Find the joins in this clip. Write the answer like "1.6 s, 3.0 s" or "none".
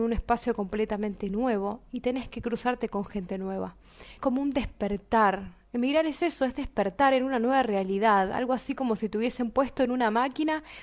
4.2 s